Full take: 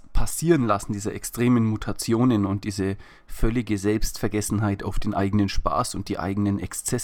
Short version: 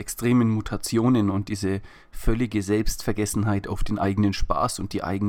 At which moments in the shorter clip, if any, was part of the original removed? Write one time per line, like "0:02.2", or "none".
none